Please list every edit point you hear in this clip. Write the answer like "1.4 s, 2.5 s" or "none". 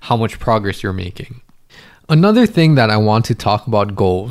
none